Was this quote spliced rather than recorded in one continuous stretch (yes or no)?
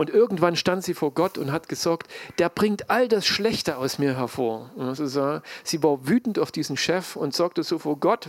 no